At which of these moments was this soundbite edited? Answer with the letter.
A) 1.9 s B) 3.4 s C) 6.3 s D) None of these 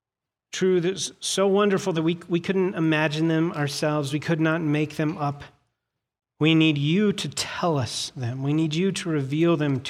D